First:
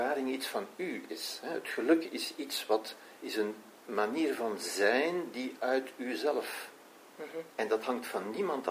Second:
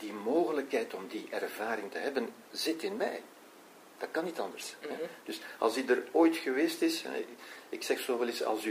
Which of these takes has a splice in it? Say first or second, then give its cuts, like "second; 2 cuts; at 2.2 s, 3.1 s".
first; 1 cut; at 7.5 s